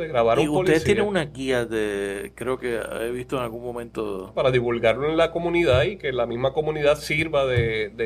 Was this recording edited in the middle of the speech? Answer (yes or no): yes